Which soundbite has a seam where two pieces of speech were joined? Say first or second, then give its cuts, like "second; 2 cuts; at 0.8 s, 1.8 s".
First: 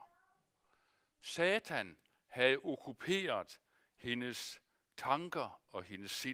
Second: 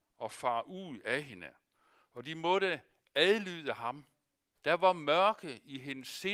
second; 1 cut; at 4.6 s